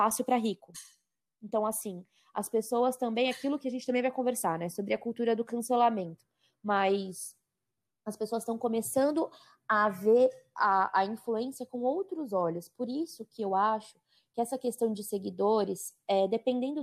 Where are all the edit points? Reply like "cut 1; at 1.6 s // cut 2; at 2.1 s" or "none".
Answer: none

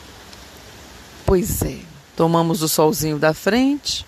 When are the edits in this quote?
cut 1; at 2.0 s

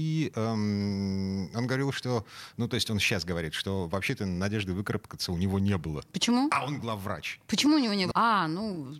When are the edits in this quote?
cut 1; at 8.1 s

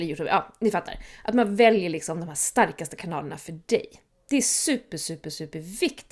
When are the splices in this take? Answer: none

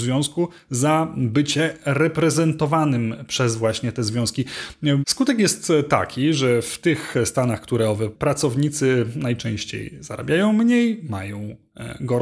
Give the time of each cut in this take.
cut 1; at 5.0 s // cut 2; at 8.1 s

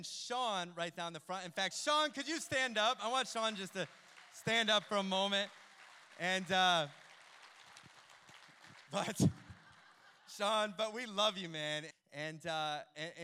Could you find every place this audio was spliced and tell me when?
cut 1; at 8.9 s // cut 2; at 11.9 s

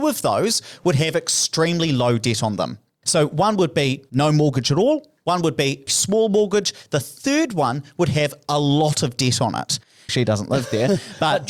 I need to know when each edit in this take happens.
cut 1; at 5.9 s // cut 2; at 10.1 s

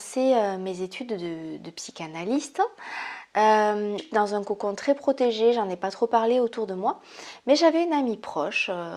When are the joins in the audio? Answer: cut 1; at 4.0 s

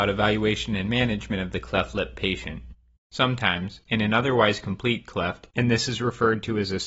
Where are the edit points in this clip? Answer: cut 1; at 3.0 s // cut 2; at 5.5 s

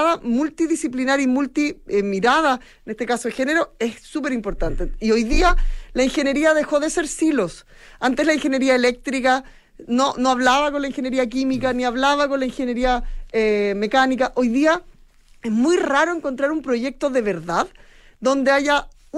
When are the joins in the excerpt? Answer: none

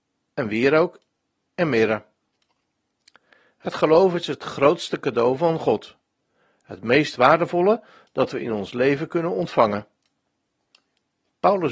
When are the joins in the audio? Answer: none

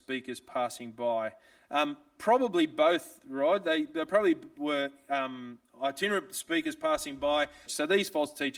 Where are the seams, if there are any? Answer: cut 1; at 7.7 s

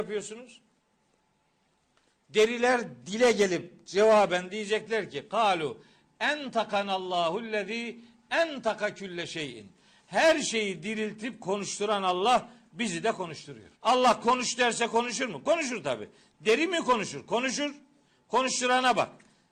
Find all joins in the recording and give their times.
cut 1; at 13.7 s

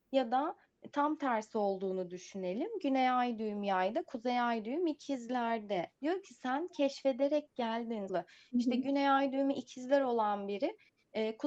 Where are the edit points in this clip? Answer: cut 1; at 5.9 s // cut 2; at 8.1 s

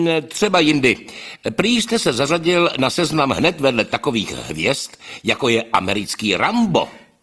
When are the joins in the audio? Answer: none

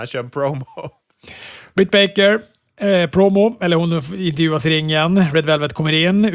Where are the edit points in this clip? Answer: none

